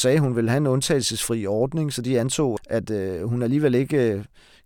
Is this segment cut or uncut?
cut